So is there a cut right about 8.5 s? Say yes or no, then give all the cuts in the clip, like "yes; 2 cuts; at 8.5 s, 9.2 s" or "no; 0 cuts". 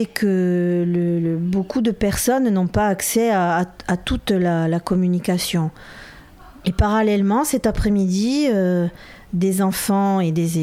no; 1 cut; at 6.6 s